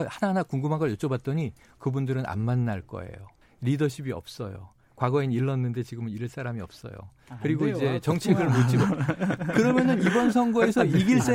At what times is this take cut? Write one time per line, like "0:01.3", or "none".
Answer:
0:03.4